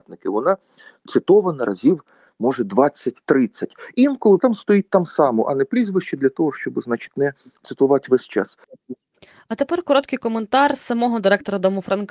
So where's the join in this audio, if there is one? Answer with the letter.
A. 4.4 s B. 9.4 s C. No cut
A